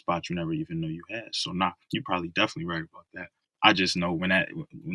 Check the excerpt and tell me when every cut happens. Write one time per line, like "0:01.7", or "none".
none